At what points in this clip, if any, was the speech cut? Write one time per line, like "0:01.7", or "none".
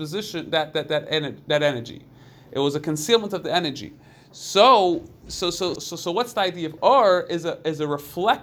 0:05.8
0:06.8